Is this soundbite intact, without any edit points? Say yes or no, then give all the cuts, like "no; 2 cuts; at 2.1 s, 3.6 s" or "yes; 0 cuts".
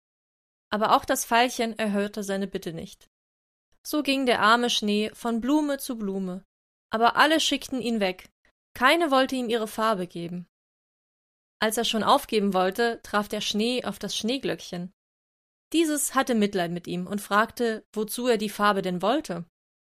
yes; 0 cuts